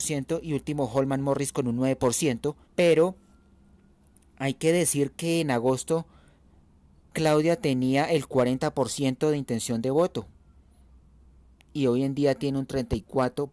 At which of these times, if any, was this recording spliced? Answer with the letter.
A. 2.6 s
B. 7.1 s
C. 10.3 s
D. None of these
A